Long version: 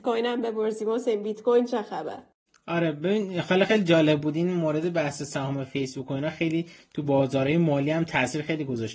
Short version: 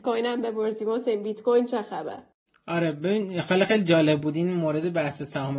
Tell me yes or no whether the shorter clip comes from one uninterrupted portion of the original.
yes